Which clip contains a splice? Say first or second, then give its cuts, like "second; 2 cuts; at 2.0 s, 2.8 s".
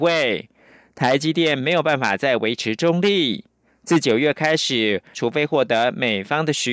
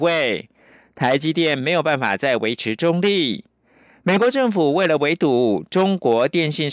first; 2 cuts; at 3.7 s, 5.1 s